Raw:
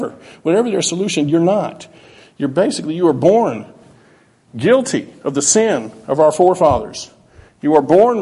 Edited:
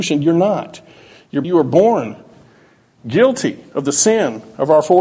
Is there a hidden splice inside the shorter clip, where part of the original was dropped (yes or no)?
yes